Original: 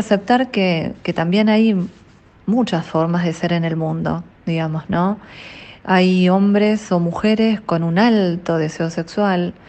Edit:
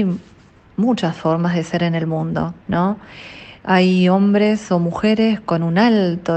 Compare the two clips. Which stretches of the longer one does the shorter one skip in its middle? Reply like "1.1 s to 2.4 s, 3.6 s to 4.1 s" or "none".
4.4 s to 4.9 s